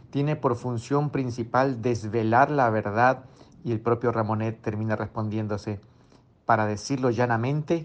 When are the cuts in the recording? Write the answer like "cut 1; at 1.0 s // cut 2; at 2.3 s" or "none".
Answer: cut 1; at 3.5 s